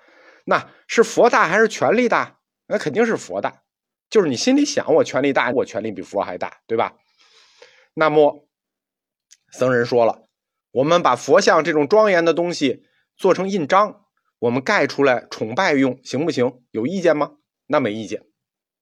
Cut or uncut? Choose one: cut